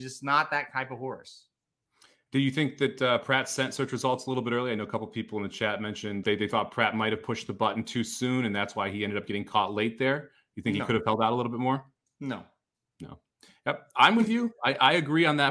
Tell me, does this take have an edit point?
yes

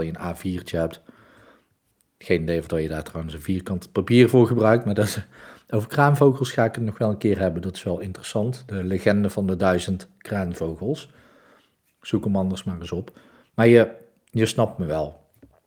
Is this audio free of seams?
yes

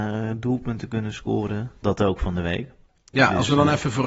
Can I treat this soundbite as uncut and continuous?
no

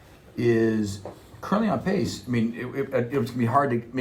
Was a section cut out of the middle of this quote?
no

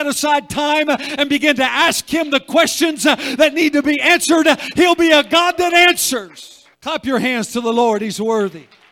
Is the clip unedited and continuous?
no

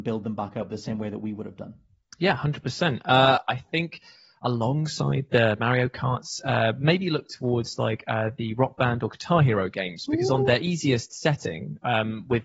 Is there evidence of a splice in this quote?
no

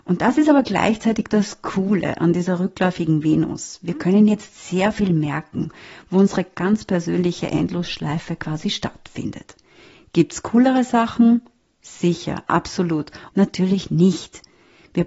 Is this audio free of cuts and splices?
no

